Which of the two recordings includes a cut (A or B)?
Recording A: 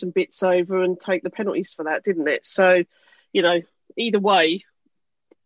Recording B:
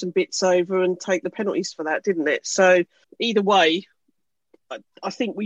B